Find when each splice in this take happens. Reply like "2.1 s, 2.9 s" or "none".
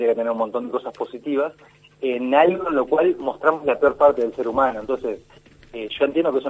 none